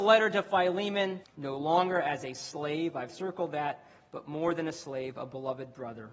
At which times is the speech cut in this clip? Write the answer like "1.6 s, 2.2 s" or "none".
1.2 s